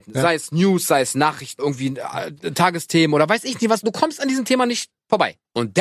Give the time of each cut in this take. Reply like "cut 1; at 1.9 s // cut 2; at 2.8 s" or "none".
cut 1; at 1.6 s

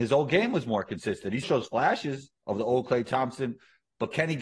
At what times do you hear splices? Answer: cut 1; at 1.4 s

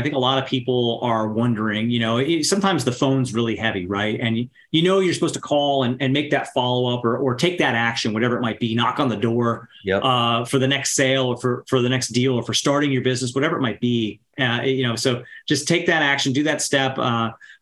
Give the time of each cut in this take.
cut 1; at 14.3 s

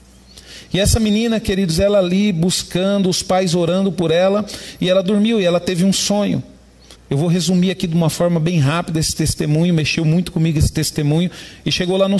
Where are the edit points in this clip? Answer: cut 1; at 6.9 s

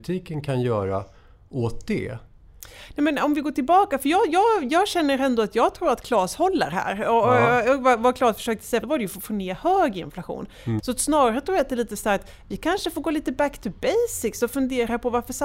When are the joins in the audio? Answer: cut 1; at 8.8 s // cut 2; at 10.8 s

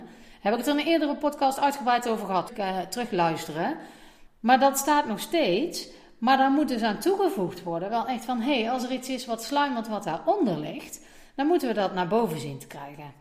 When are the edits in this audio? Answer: cut 1; at 2.5 s // cut 2; at 4.3 s

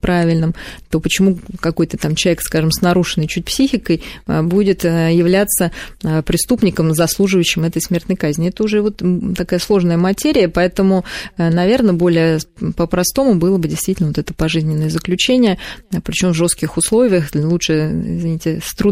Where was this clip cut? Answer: none

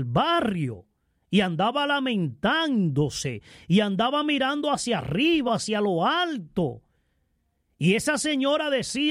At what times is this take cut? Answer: cut 1; at 5.5 s

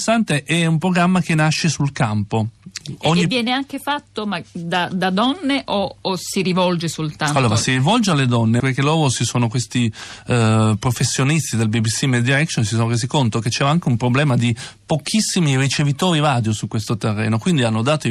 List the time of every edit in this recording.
cut 1; at 8.6 s

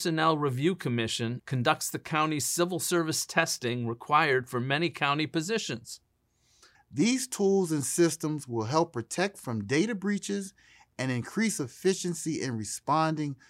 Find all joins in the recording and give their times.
cut 1; at 1.4 s // cut 2; at 6.7 s

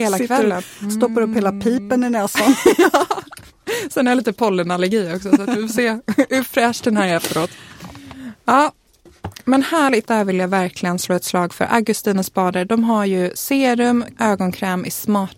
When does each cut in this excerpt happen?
cut 1; at 10.1 s // cut 2; at 14.1 s

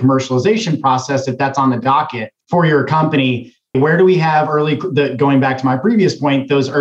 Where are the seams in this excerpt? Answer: cut 1; at 2.4 s // cut 2; at 3.7 s

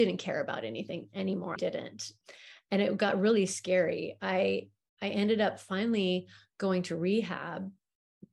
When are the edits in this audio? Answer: cut 1; at 1.6 s

